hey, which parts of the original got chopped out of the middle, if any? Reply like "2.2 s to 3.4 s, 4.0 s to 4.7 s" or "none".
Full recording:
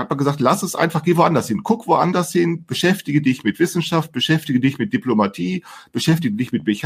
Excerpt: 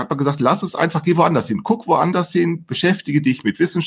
none